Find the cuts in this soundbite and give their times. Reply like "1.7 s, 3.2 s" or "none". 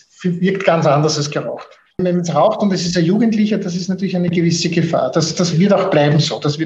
5.5 s

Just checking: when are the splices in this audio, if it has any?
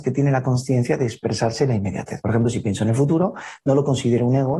none

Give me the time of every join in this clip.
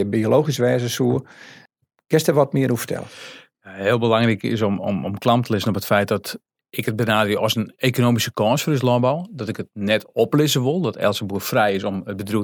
none

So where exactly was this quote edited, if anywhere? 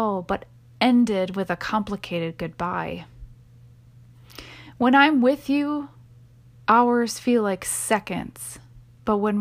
none

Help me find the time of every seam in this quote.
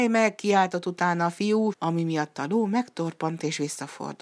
1.7 s

